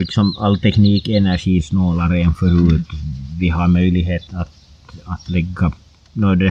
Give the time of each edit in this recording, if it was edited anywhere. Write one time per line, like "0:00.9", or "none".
0:04.3